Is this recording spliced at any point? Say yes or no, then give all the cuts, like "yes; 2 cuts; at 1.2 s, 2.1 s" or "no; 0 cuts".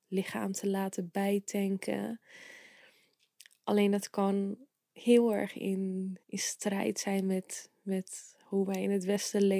yes; 1 cut; at 6.2 s